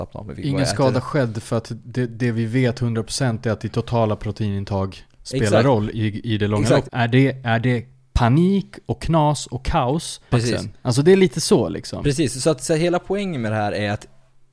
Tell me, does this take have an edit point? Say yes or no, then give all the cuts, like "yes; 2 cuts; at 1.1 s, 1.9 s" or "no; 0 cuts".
yes; 2 cuts; at 6.9 s, 10.3 s